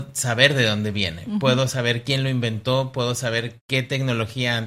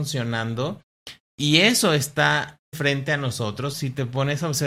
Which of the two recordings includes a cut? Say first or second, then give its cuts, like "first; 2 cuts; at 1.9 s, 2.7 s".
second; 2 cuts; at 2.7 s, 3.7 s